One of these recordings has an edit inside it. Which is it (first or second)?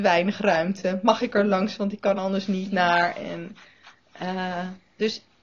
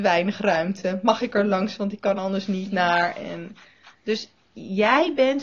second